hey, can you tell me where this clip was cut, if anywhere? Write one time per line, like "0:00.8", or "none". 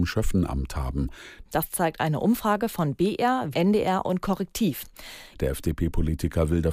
0:01.4
0:03.5
0:05.3